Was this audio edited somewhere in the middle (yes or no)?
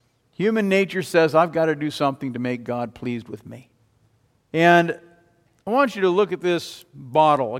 yes